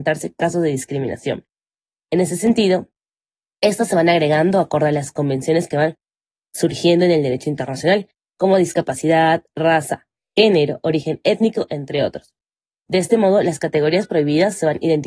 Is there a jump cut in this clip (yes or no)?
no